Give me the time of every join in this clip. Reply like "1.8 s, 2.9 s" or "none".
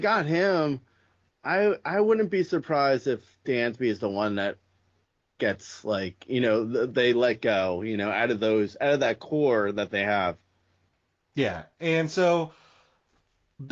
none